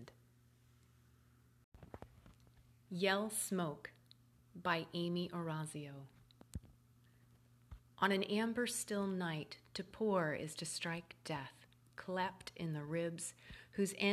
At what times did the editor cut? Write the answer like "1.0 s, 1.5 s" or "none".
none